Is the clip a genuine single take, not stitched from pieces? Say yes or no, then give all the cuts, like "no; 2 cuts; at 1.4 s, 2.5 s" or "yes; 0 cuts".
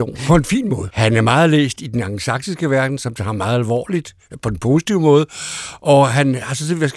no; 1 cut; at 0.9 s